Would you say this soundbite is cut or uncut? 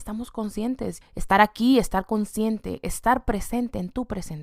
cut